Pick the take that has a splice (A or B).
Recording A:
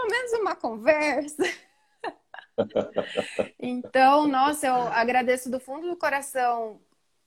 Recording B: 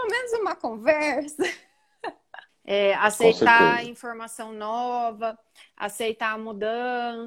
B